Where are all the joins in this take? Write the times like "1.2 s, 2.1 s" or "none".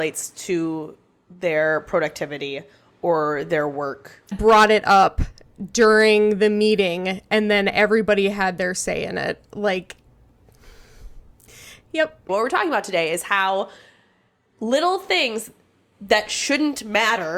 4.3 s, 12.3 s